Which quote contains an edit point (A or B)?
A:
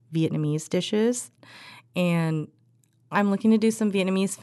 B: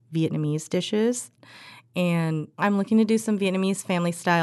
B